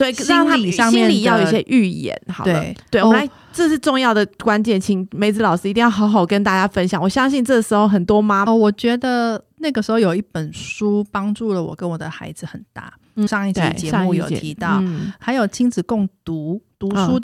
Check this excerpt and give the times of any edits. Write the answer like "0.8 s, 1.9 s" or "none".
8.5 s, 13.3 s